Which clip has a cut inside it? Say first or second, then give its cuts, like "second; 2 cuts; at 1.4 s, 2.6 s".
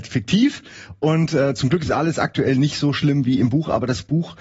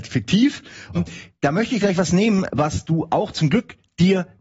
second; 1 cut; at 0.9 s